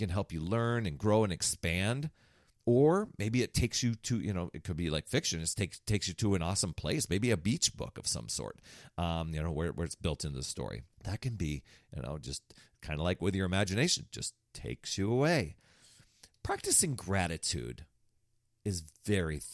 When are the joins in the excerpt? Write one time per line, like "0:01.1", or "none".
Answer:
0:10.9